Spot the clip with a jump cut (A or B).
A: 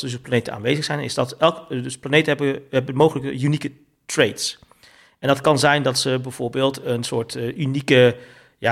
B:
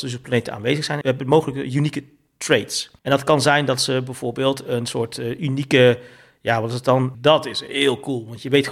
B